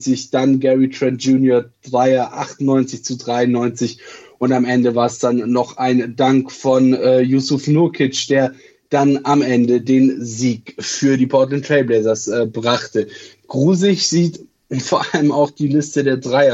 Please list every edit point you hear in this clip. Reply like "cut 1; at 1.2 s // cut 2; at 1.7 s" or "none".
none